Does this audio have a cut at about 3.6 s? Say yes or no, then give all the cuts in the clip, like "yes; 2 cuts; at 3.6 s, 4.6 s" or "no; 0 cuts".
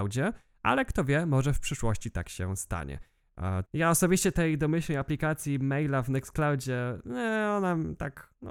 yes; 1 cut; at 3.6 s